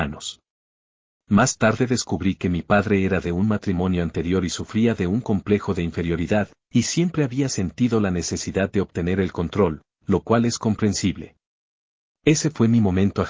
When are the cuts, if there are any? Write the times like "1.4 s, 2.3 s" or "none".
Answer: none